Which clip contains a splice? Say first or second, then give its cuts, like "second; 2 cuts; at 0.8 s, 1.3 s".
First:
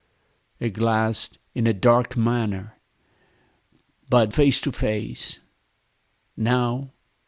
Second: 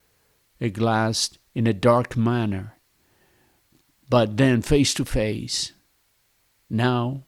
first; 1 cut; at 4.3 s